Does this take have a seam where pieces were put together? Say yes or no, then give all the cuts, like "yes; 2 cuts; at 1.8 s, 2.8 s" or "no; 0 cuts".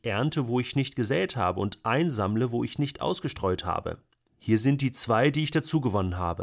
yes; 1 cut; at 4.3 s